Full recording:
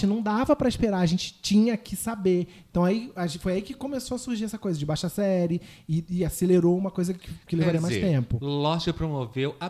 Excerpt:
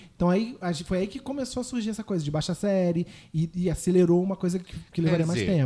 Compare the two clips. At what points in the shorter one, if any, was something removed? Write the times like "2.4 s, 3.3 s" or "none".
none